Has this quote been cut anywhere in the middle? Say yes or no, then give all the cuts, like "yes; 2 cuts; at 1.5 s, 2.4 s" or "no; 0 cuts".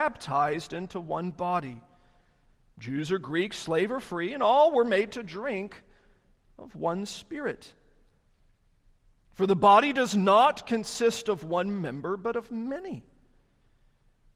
no; 0 cuts